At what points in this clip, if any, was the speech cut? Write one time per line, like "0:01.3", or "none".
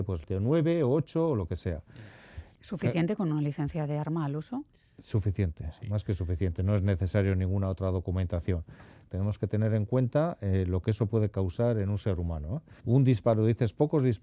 0:09.1
0:12.8